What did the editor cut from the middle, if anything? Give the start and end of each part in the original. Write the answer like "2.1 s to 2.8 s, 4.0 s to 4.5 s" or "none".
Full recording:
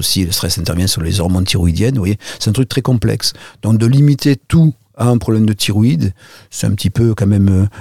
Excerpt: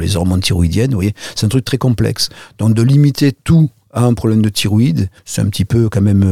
6.2 s to 6.4 s